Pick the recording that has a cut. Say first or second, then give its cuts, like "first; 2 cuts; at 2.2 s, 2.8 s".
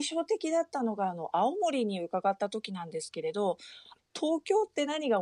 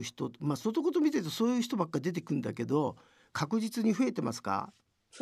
first; 1 cut; at 4.0 s